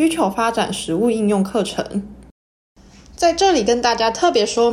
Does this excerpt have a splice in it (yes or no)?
no